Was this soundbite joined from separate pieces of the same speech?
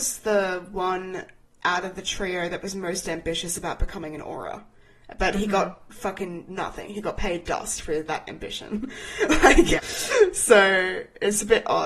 yes; 1 cut; at 9.8 s

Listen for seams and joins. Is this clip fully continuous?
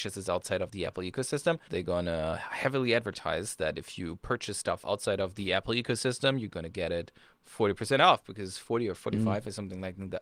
no; 1 cut; at 1.7 s

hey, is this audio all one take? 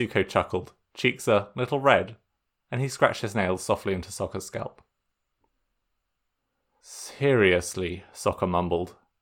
yes; 0 cuts

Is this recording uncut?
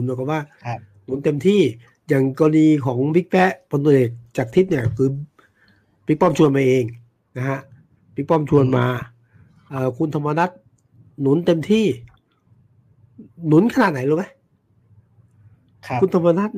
yes; 0 cuts

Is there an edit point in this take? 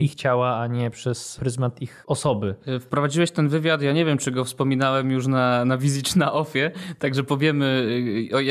no; 0 cuts

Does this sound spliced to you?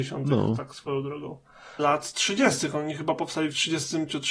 yes; 1 cut; at 1.8 s

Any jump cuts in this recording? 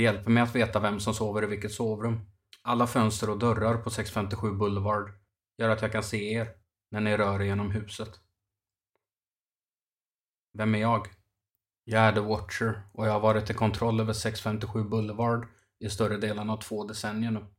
yes; 1 cut; at 2.5 s

